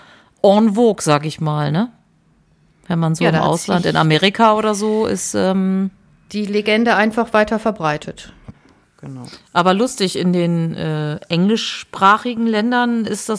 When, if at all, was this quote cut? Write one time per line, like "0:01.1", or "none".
0:08.5

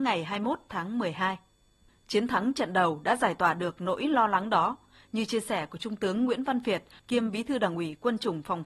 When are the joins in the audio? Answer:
0:01.9
0:07.0

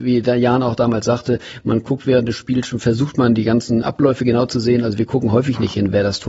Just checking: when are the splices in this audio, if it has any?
0:03.8

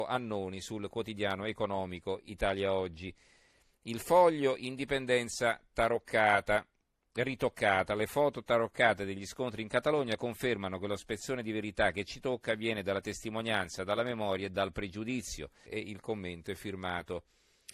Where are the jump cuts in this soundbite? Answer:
0:15.7

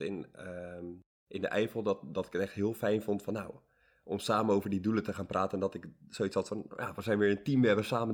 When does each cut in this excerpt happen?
none

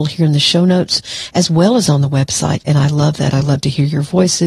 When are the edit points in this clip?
none

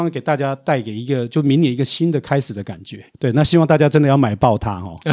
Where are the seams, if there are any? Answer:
0:03.1

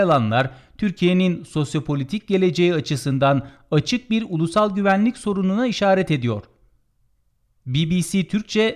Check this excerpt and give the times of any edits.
none

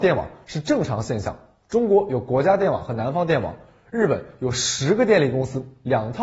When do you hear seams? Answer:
none

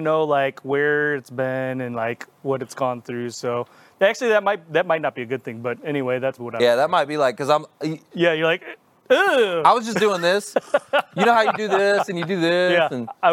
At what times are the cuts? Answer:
0:06.4

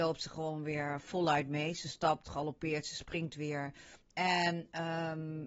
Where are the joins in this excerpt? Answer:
0:02.2
0:04.0

